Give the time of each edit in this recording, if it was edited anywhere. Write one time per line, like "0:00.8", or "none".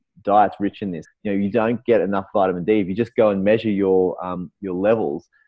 0:01.0